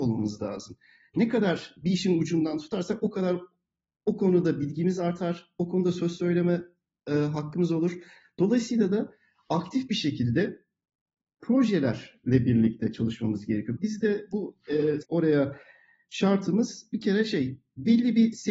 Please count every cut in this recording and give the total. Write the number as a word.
two